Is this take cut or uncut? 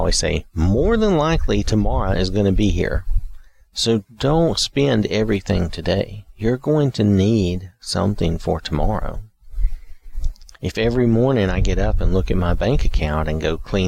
uncut